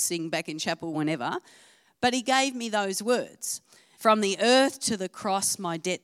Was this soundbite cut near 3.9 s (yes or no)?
yes